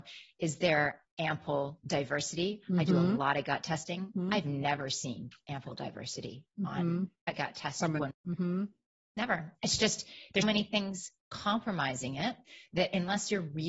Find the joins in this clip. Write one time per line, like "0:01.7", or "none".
0:08.1
0:10.4